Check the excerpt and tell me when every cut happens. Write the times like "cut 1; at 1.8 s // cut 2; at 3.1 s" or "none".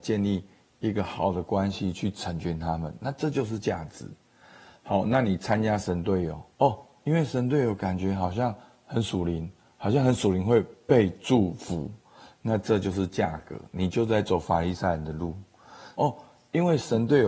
cut 1; at 6.5 s // cut 2; at 16.0 s